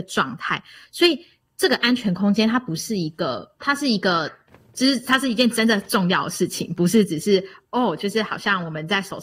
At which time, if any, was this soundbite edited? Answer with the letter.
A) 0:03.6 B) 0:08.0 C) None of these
A